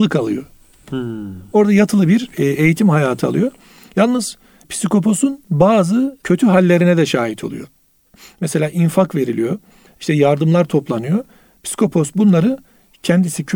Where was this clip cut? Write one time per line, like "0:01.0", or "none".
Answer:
0:09.9